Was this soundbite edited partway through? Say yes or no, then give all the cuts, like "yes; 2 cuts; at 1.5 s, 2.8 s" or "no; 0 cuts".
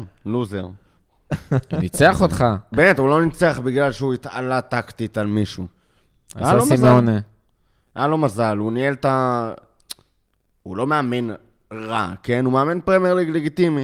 yes; 1 cut; at 2.7 s